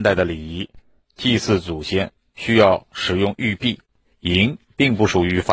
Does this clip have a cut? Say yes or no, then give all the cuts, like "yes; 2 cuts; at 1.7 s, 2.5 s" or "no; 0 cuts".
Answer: yes; 2 cuts; at 1.0 s, 4.0 s